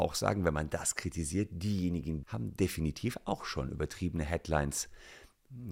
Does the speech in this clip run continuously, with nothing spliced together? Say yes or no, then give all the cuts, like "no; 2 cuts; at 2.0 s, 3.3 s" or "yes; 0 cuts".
no; 1 cut; at 2.2 s